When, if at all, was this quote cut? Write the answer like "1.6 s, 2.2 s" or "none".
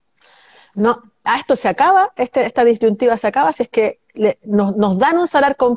none